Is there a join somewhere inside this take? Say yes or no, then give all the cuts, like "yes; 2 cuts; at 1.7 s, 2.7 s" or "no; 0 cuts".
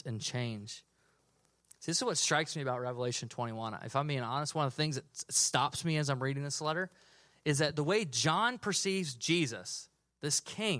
no; 0 cuts